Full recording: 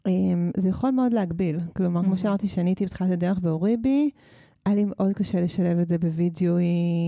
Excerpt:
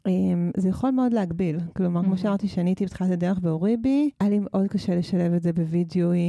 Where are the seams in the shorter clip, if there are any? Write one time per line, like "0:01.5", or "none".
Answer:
0:04.1